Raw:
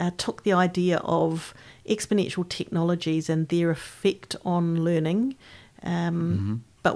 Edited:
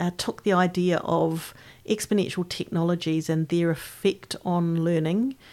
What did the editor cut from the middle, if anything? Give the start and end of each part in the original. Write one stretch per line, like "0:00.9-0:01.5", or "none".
none

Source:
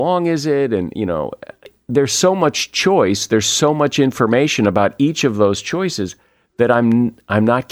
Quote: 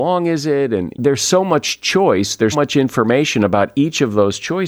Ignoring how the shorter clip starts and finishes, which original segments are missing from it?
0:00.9-0:01.8
0:03.4-0:03.7

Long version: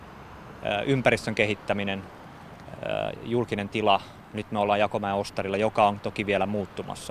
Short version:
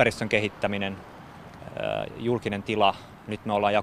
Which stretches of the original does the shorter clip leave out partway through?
none

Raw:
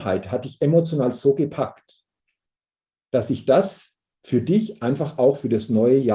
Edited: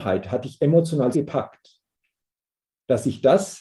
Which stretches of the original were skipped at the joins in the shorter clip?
0:01.1-0:01.4

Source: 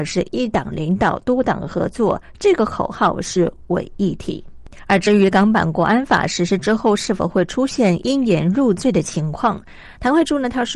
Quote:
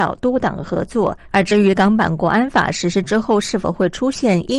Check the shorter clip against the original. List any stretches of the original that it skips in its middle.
0:02.3-0:04.8

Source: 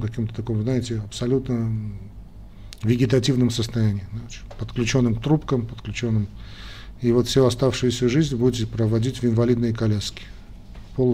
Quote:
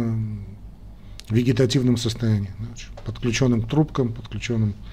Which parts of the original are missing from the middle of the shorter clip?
none

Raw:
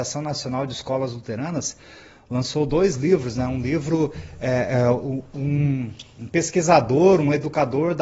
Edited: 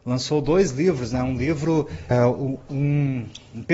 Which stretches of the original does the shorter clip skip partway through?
0:04.4-0:04.8

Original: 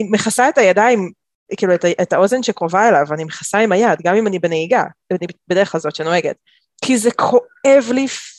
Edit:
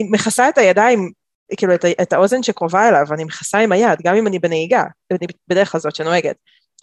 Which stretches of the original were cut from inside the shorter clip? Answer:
none

